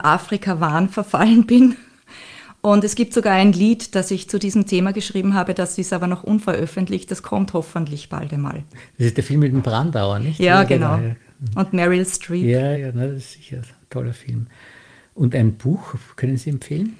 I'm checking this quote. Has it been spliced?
yes; 1 cut; at 12.7 s

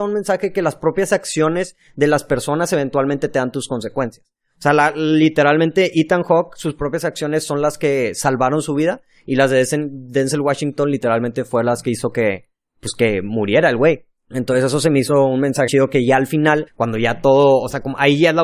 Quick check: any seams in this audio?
yes; 3 cuts; at 14.2 s, 15.7 s, 16.7 s

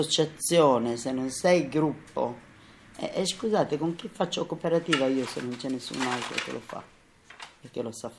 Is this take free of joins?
yes; 0 cuts

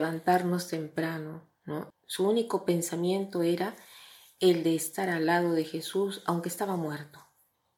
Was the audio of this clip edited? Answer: yes; 1 cut; at 1.9 s

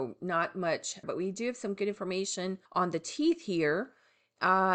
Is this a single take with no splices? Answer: no; 2 cuts; at 1.0 s, 2.7 s

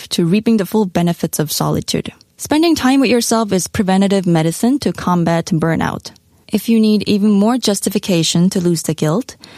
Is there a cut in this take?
yes; 2 cuts; at 2.3 s, 6.4 s

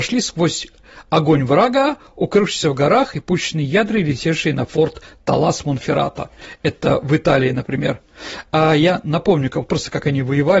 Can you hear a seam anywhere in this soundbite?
no; 0 cuts

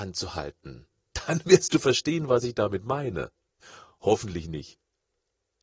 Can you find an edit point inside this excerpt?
yes; 1 cut; at 3.6 s

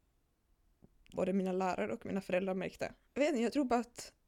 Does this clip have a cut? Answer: yes; 2 cuts; at 1.1 s, 3.1 s

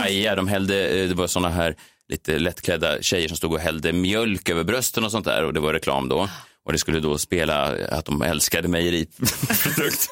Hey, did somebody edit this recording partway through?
no; 0 cuts

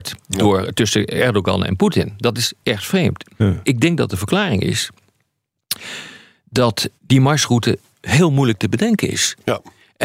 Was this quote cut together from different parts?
yes; 1 cut; at 7.0 s

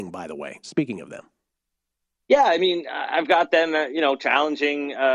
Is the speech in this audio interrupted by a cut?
no; 0 cuts

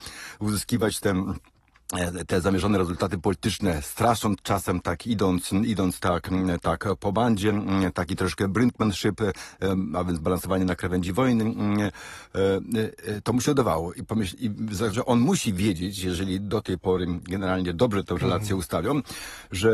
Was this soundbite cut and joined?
yes; 2 cuts; at 6.0 s, 14.9 s

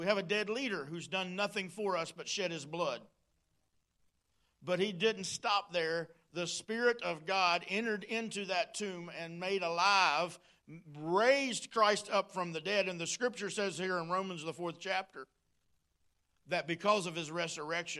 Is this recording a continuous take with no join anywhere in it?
yes; 0 cuts

